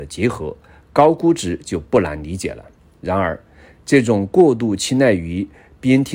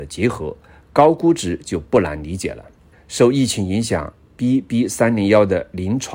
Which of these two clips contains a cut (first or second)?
second